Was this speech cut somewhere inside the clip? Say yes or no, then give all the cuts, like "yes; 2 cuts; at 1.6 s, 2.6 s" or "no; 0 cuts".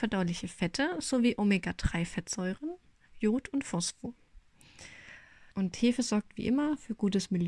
yes; 1 cut; at 5.5 s